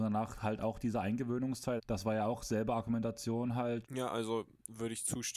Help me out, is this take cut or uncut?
cut